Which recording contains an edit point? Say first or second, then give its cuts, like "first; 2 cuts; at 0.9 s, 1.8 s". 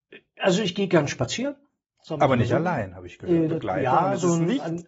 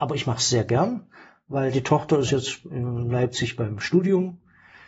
first; 1 cut; at 3.5 s